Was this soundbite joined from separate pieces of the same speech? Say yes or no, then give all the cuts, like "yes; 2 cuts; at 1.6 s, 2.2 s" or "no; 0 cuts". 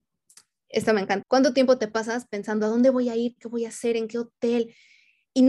yes; 1 cut; at 1.2 s